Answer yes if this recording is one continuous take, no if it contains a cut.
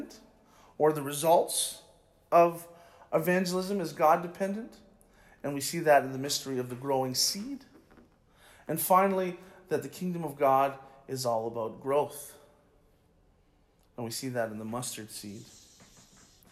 yes